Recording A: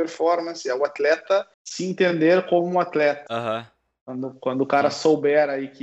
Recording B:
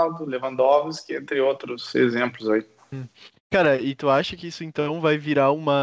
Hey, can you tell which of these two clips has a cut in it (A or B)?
A